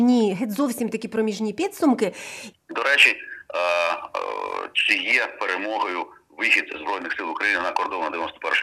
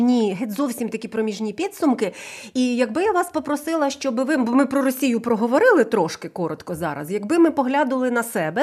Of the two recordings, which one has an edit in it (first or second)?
first